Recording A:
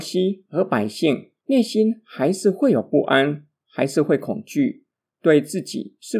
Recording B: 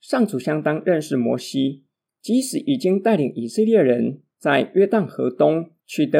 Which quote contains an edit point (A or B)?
A